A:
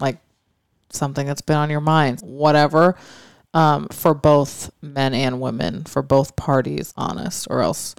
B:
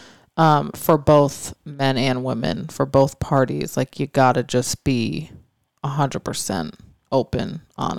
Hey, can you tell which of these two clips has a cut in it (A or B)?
A